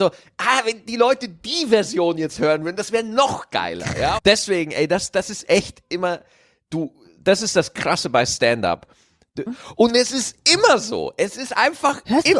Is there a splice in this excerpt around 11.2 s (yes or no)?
no